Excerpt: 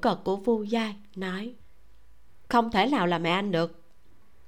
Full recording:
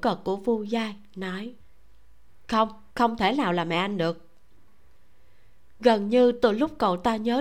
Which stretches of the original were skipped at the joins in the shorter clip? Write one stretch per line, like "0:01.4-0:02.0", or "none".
0:02.5-0:02.9